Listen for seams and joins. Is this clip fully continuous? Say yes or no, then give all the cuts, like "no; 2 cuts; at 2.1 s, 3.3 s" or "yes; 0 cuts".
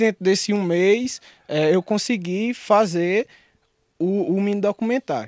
yes; 0 cuts